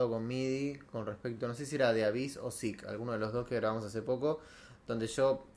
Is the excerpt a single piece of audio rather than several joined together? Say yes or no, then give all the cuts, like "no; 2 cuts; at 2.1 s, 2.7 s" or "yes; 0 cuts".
yes; 0 cuts